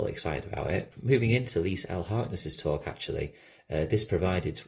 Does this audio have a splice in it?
yes; 1 cut; at 0.9 s

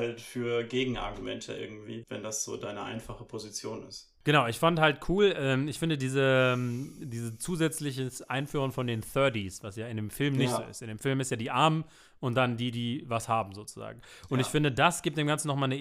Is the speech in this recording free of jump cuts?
no; 1 cut; at 2.0 s

